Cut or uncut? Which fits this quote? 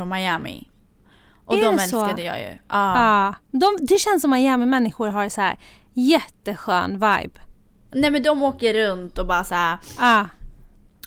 uncut